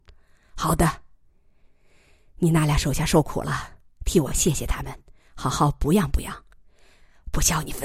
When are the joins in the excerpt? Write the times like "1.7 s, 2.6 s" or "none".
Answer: none